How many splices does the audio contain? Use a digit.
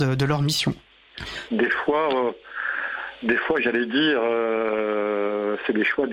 1